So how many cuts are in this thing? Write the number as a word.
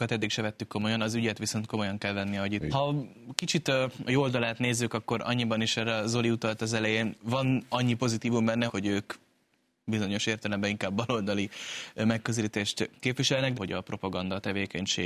three